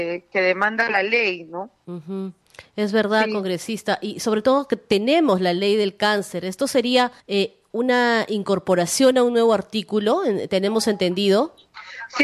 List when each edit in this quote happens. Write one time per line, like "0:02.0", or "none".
0:07.2